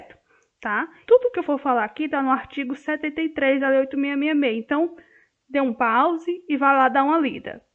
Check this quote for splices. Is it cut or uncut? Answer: cut